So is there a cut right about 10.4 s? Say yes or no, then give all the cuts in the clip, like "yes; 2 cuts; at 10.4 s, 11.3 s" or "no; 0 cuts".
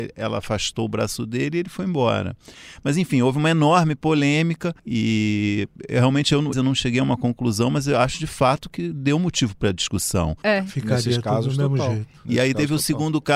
yes; 3 cuts; at 4.8 s, 6.5 s, 10.4 s